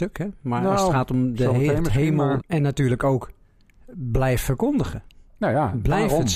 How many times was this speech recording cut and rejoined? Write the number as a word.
one